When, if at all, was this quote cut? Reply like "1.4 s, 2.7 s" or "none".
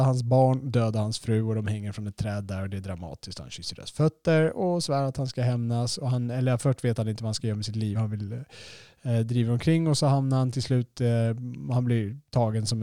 none